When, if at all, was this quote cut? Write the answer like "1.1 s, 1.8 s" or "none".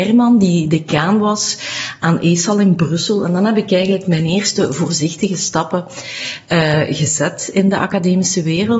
none